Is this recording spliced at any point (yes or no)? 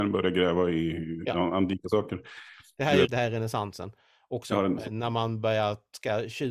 yes